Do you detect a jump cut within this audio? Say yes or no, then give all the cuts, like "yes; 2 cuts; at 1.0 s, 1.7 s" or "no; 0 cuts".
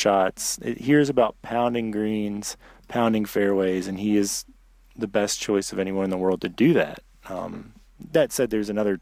no; 0 cuts